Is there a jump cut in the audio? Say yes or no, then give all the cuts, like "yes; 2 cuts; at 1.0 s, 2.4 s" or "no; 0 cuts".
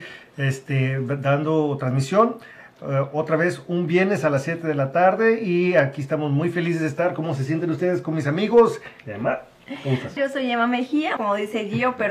yes; 3 cuts; at 9.0 s, 10.2 s, 11.2 s